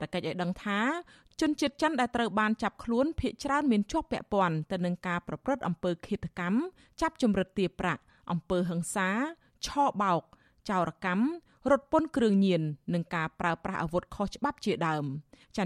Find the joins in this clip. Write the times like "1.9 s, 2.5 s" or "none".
none